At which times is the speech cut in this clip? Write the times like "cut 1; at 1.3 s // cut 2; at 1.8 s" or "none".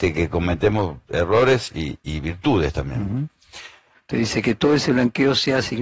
cut 1; at 3.9 s